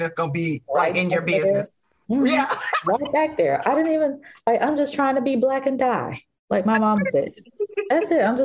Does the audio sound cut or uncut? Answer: uncut